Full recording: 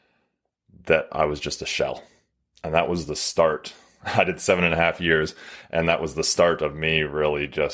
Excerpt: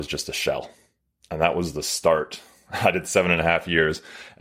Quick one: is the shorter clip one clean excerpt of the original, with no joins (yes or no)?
yes